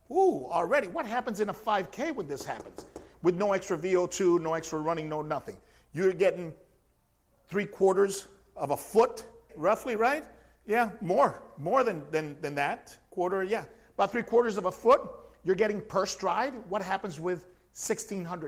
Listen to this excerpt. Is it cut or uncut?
cut